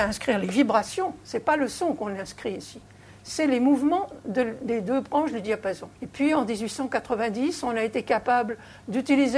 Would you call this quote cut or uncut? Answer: cut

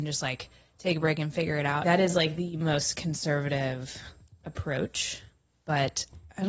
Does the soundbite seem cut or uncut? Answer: cut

